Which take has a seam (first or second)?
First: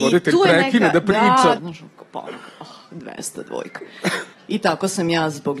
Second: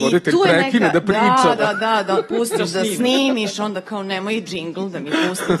first